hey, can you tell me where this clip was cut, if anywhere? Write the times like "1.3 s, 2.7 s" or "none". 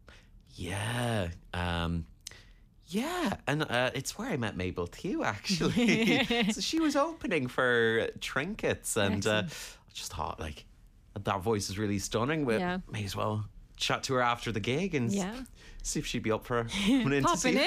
none